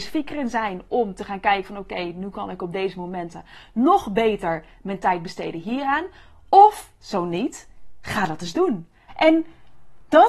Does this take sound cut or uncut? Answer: cut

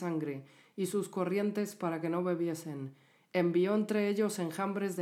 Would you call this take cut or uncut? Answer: uncut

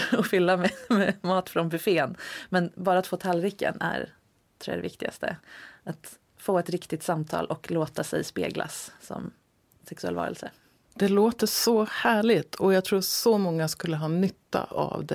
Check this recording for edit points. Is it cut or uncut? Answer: uncut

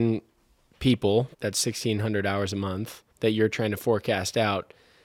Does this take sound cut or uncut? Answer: cut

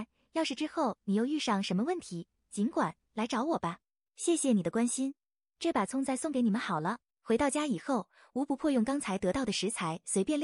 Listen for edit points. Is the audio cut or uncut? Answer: cut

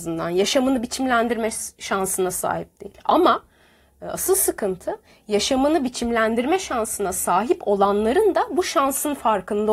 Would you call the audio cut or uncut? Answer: uncut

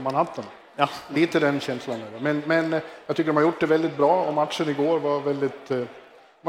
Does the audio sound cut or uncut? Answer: uncut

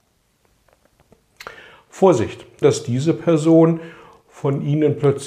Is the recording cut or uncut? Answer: cut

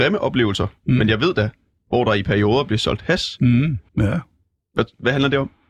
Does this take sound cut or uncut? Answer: cut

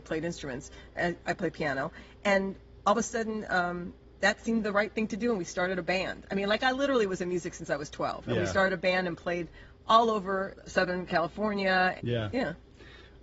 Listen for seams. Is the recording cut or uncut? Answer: cut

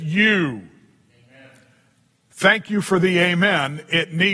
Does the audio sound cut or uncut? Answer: uncut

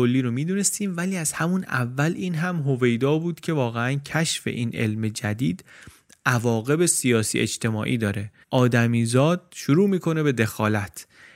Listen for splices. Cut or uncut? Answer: cut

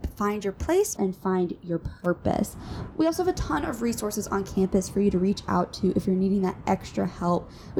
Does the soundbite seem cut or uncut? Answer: cut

